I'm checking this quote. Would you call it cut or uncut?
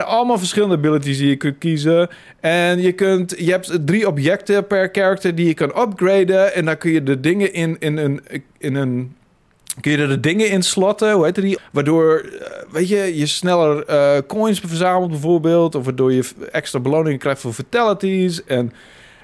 cut